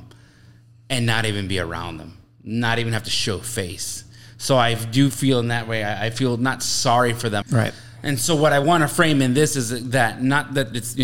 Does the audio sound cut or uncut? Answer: cut